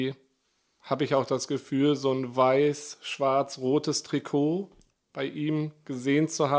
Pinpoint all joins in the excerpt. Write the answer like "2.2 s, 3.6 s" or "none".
none